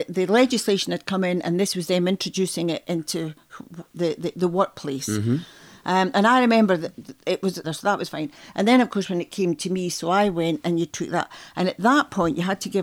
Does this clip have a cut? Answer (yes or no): yes